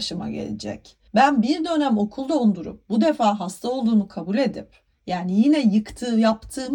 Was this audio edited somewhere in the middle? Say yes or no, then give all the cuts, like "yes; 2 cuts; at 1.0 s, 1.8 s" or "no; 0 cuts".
yes; 1 cut; at 1.1 s